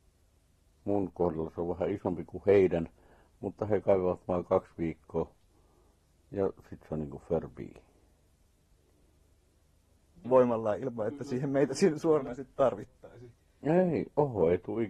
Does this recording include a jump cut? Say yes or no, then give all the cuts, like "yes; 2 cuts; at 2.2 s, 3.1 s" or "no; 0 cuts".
yes; 1 cut; at 10.2 s